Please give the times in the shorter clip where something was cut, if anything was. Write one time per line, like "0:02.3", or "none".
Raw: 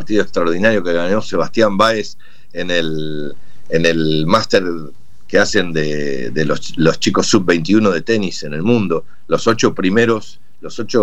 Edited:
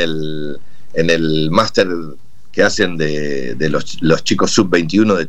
none